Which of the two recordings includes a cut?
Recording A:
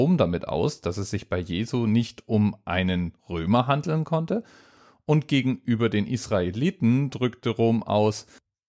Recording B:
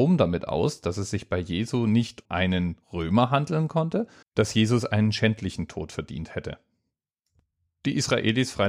B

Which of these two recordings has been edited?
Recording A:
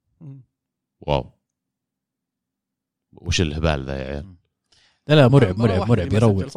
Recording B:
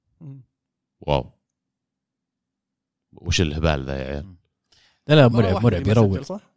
B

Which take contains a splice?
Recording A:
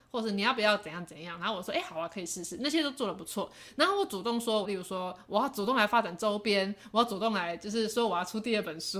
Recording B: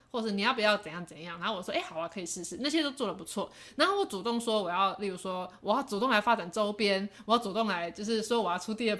A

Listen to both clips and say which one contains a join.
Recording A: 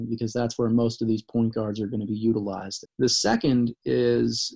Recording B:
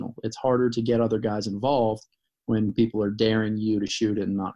A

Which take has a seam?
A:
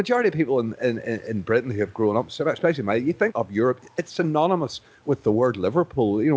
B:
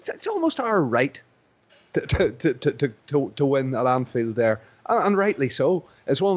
A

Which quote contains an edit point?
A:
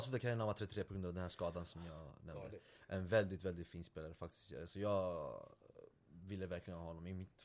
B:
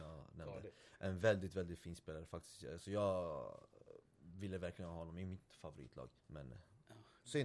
B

